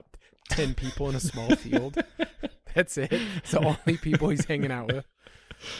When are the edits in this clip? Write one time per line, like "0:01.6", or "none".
none